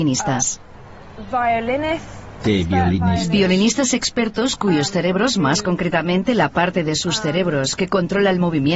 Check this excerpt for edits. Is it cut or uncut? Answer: cut